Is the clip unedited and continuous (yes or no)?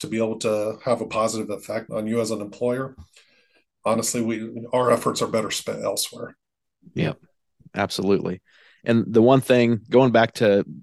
no